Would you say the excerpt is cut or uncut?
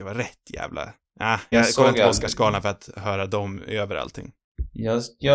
cut